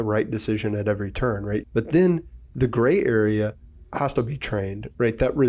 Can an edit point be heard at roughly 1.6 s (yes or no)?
yes